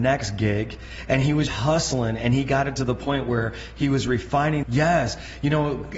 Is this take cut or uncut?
cut